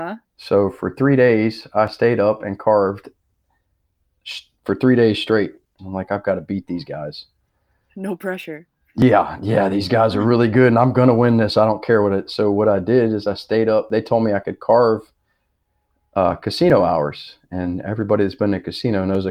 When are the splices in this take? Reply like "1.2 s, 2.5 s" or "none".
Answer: 5.8 s